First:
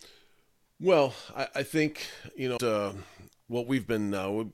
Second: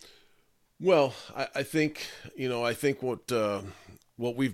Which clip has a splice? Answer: first; 1 cut; at 2.6 s

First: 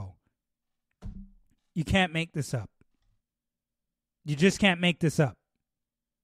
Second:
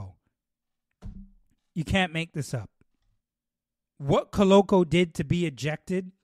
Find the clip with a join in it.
second; 1 cut; at 3.8 s

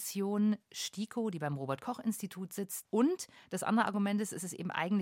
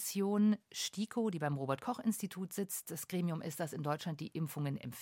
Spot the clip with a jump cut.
first; 1 cut; at 2.8 s

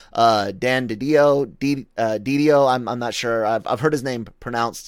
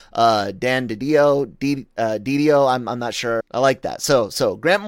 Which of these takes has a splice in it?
second; 1 cut; at 3.4 s

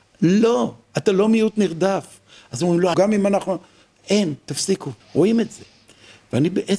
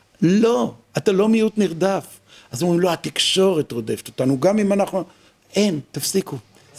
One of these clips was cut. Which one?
first; 2 cuts; at 2.9 s, 5.0 s

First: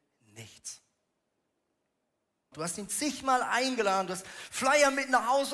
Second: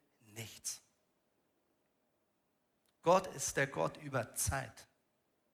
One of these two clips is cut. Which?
first; 1 cut; at 2.5 s

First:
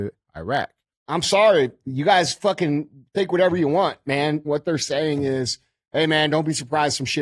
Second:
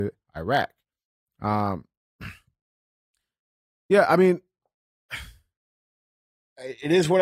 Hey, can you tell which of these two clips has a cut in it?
first; 2 cuts; at 0.9 s, 4.4 s

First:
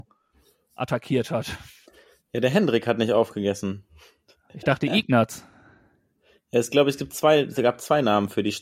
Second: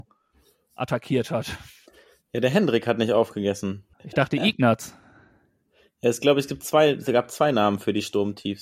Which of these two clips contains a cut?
second; 1 cut; at 3.9 s

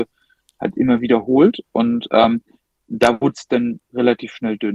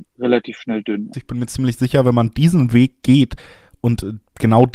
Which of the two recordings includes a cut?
second; 1 cut; at 1.1 s

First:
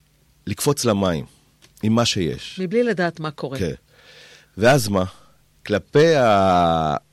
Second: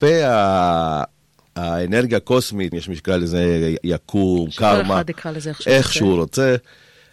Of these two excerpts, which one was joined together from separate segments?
second; 1 cut; at 2.7 s

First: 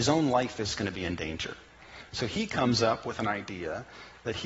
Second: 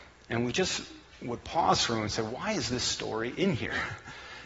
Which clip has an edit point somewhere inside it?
first; 1 cut; at 2.1 s

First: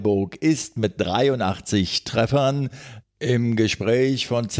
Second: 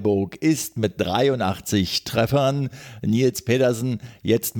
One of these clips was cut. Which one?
first; 1 cut; at 3.0 s

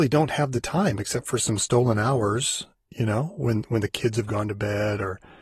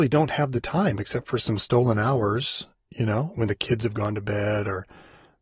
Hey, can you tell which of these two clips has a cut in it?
second; 1 cut; at 3.3 s

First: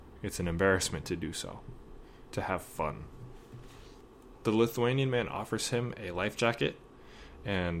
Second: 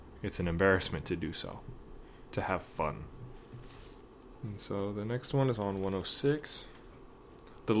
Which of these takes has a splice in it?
first; 1 cut; at 4.4 s

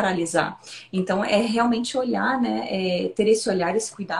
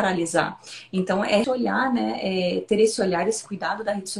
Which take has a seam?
second; 1 cut; at 1.4 s

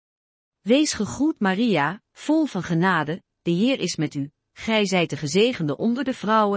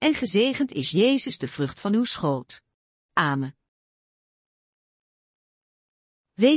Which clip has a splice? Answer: second; 1 cut; at 3.1 s

